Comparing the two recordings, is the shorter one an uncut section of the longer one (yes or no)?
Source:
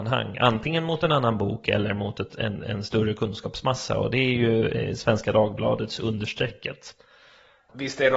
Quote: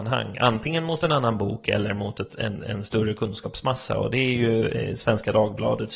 yes